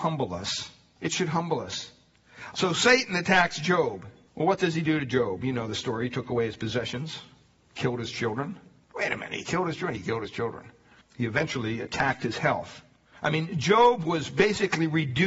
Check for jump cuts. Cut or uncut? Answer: cut